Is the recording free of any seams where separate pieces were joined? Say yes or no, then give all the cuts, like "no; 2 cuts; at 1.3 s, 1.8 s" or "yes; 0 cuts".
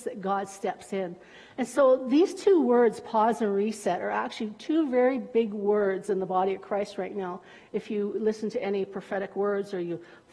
yes; 0 cuts